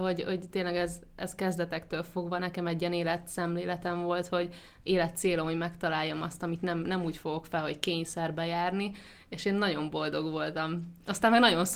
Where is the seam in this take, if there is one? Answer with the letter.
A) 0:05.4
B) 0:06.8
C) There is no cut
C